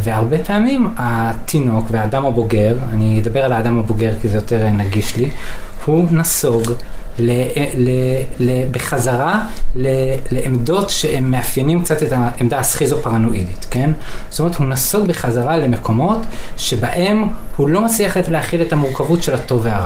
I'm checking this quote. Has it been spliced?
yes; 1 cut; at 8.3 s

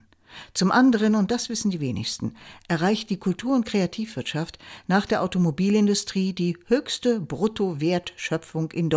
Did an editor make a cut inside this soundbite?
no; 0 cuts

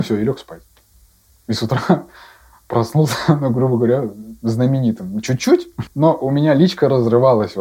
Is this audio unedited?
no; 1 cut; at 5.9 s

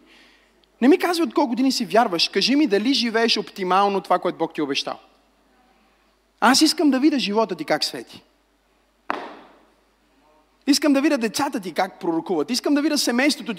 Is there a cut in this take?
no; 0 cuts

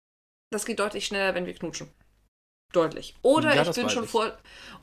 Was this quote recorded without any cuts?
yes; 0 cuts

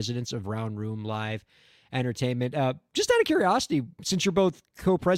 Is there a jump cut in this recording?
no; 0 cuts

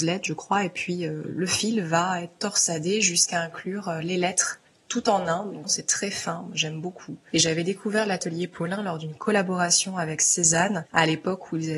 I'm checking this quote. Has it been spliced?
yes; 1 cut; at 5.6 s

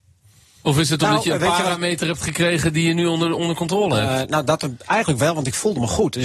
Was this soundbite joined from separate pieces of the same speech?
no; 0 cuts

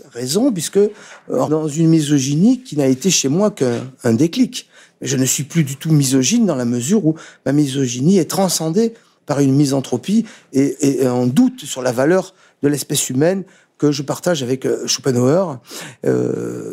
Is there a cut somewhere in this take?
yes; 2 cuts; at 1.5 s, 10.7 s

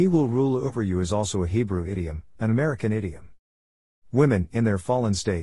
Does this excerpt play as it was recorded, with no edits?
no; 1 cut; at 2.4 s

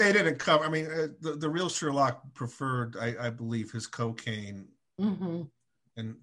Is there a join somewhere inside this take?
no; 0 cuts

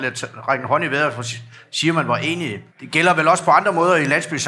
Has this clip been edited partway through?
yes; 1 cut; at 2.7 s

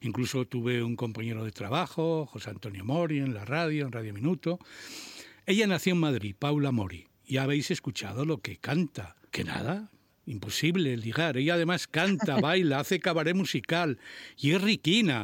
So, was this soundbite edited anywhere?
yes; 1 cut; at 9.3 s

